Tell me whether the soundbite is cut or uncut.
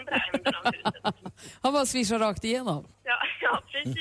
cut